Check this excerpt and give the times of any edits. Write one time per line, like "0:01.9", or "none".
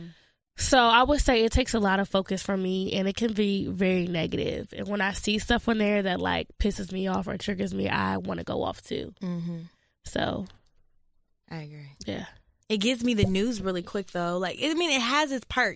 none